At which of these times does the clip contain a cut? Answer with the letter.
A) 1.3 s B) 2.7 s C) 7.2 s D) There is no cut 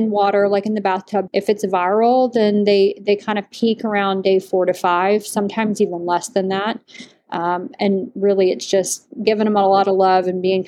A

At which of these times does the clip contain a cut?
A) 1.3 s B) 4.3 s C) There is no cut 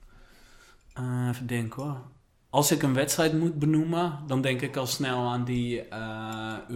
C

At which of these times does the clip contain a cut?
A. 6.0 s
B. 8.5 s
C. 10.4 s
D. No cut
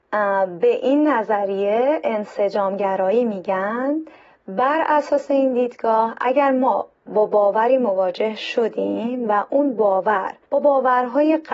C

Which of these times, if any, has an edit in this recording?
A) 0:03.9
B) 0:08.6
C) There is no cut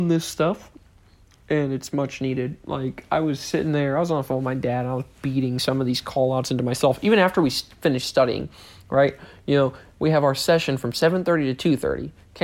C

